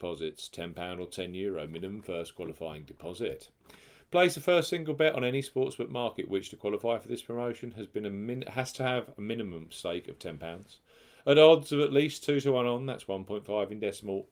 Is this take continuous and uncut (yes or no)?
yes